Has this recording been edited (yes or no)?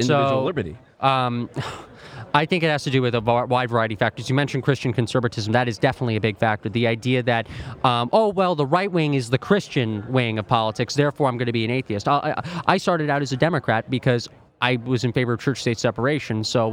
no